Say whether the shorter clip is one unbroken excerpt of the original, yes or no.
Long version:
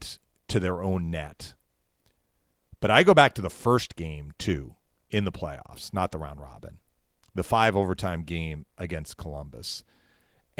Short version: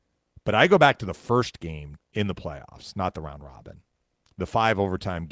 no